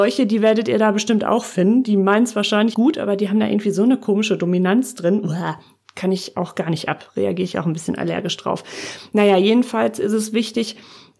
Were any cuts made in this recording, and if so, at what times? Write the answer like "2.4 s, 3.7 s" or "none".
2.7 s